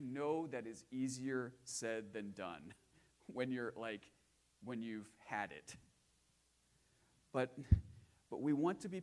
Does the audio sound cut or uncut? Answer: uncut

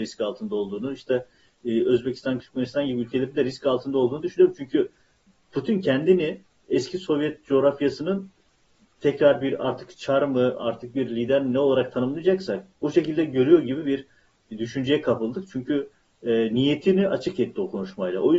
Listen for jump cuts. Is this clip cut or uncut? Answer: cut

